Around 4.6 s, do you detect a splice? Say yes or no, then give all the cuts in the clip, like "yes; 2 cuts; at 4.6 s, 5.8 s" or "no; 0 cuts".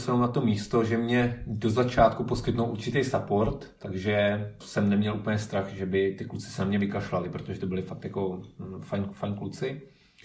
yes; 1 cut; at 4.6 s